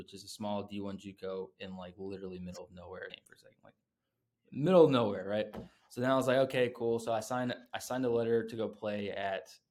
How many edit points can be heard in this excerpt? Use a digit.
1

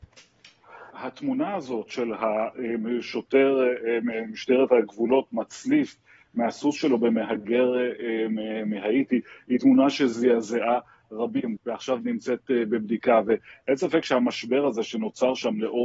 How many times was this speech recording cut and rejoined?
2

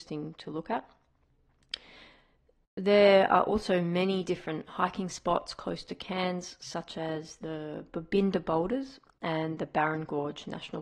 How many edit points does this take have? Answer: 0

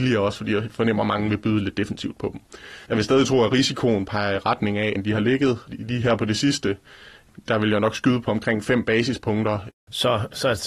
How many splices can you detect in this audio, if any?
3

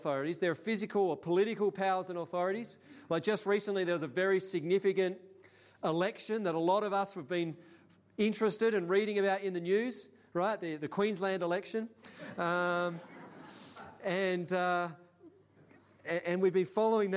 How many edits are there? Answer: 0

